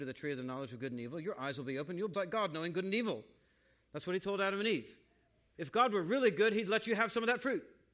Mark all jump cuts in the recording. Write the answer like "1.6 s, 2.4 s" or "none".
2.1 s, 5.5 s